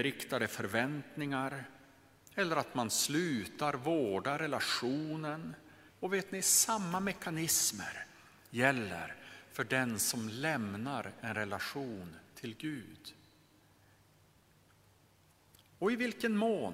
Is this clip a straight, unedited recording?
no; 1 cut; at 5.9 s

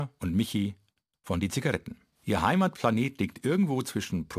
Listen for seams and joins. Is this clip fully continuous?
no; 1 cut; at 2.2 s

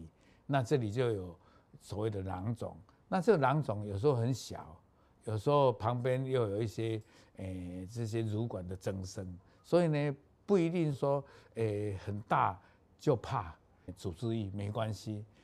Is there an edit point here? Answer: yes; 2 cuts; at 10.9 s, 13.9 s

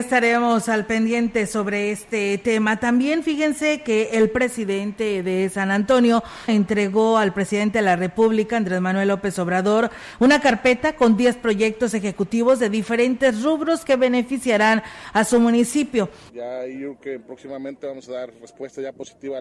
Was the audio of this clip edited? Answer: yes; 2 cuts; at 6.5 s, 16.3 s

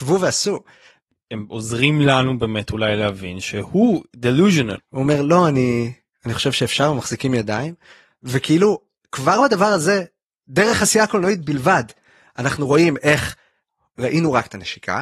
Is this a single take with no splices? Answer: no; 1 cut; at 4.8 s

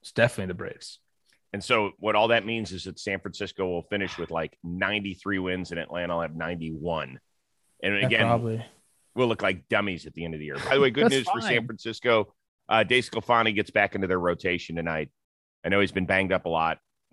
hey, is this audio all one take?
no; 1 cut; at 2.0 s

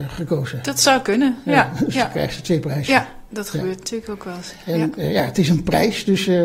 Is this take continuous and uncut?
yes; 0 cuts

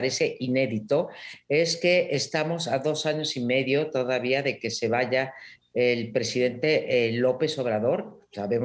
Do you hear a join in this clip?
no; 0 cuts

